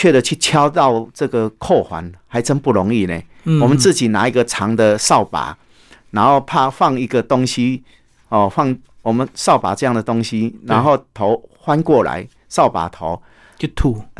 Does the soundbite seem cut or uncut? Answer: uncut